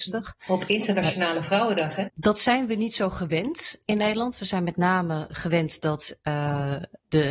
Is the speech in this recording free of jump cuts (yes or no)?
no